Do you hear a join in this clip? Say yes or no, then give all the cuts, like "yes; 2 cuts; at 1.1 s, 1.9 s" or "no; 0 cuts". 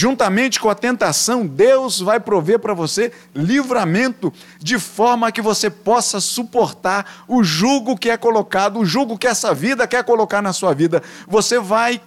no; 0 cuts